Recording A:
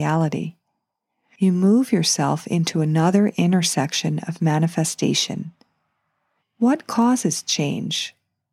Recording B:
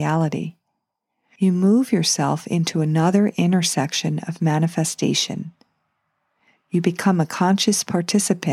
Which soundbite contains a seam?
A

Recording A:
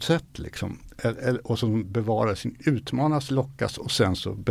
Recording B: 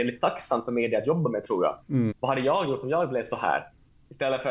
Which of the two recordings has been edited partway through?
B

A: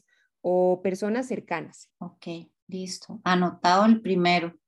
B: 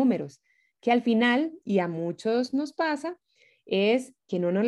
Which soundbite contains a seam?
A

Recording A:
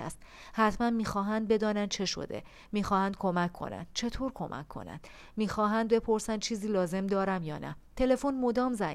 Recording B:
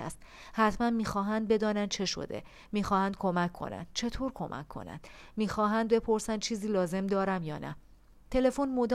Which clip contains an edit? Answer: A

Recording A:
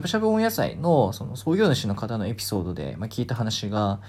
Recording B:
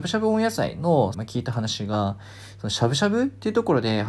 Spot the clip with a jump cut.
B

